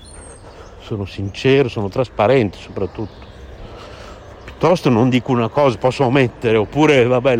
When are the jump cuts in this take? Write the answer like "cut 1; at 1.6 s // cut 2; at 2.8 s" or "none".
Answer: none

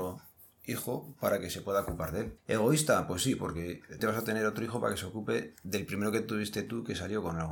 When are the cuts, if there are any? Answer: cut 1; at 4.0 s

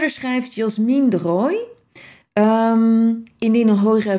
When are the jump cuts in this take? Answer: cut 1; at 2.2 s

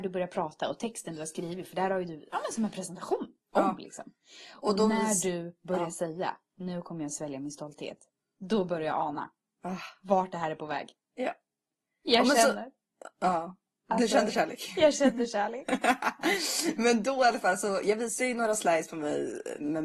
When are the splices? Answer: none

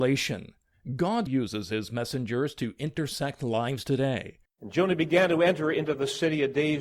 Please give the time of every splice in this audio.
cut 1; at 1.3 s // cut 2; at 4.5 s

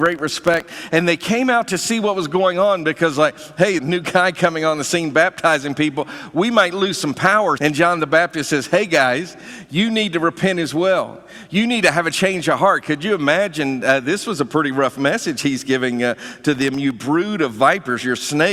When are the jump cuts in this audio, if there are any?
cut 1; at 3.8 s // cut 2; at 7.6 s

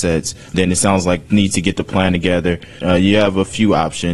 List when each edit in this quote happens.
cut 1; at 1.3 s // cut 2; at 2.8 s

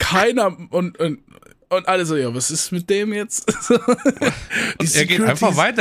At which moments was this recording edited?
none

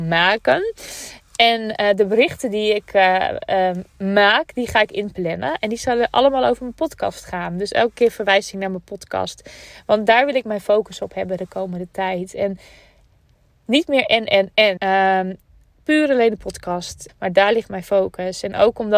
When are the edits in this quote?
cut 1; at 14.8 s // cut 2; at 17.1 s

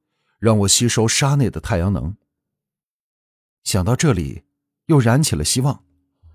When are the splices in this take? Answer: none

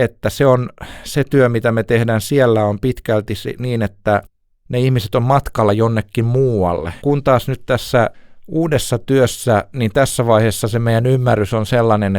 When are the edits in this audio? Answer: cut 1; at 7.0 s

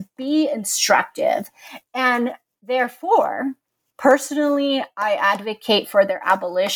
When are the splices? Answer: cut 1; at 3.9 s

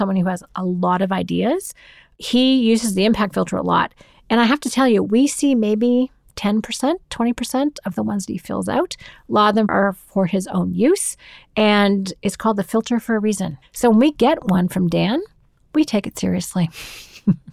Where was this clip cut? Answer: cut 1; at 13.6 s

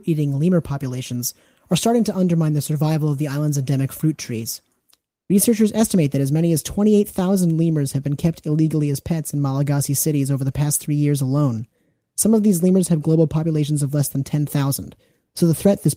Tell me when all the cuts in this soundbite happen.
none

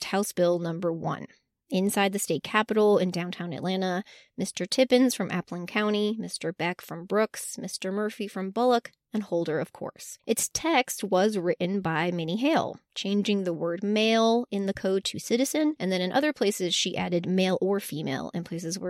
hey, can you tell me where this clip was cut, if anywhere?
none

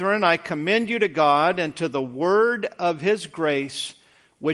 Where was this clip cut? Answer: none

